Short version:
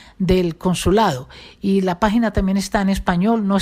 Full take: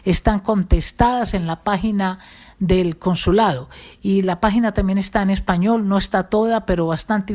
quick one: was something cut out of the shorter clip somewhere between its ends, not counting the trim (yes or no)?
no